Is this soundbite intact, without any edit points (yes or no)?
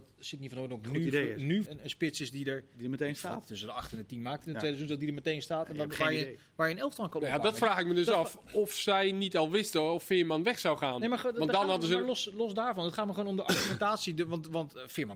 no